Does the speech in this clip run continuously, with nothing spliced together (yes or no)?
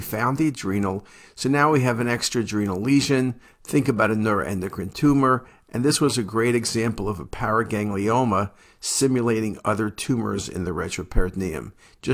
yes